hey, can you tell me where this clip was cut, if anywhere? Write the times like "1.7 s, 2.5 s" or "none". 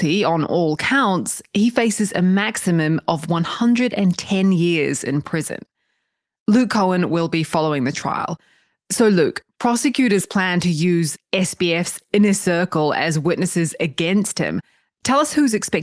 none

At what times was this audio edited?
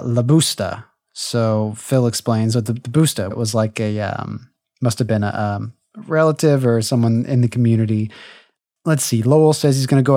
3.3 s

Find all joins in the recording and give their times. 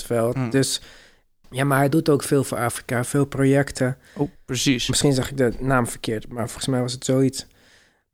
1.4 s, 4.4 s

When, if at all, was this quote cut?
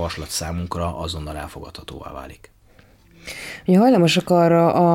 none

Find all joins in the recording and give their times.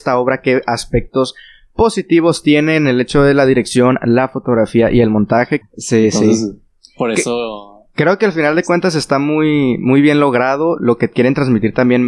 5.6 s

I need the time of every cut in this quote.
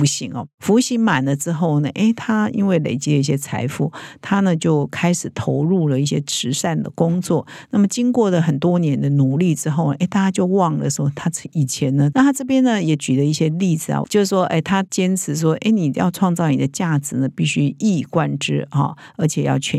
12.1 s, 14.0 s

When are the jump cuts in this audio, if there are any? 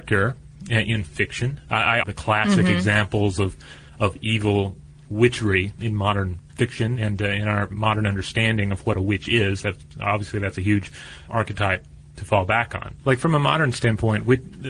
2.0 s, 11.3 s, 13.0 s

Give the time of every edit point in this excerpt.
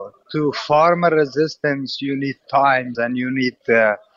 2.9 s

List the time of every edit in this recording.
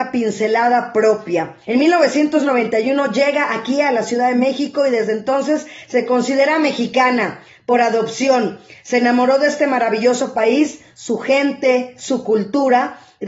1.6 s

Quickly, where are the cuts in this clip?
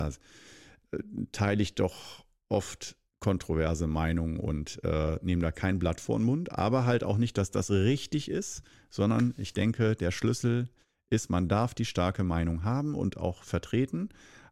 none

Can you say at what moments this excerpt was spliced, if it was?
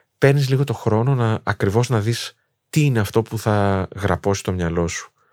none

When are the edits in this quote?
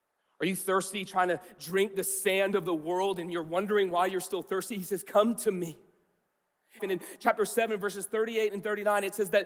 6.8 s

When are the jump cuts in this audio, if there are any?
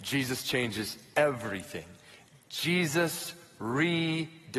none

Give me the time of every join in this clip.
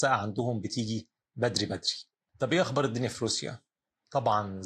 none

